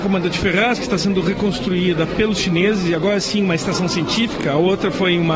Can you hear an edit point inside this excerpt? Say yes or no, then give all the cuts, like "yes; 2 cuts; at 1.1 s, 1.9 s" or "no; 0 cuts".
no; 0 cuts